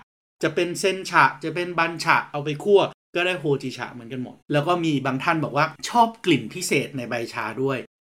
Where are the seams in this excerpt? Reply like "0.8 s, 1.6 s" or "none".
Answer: 4.4 s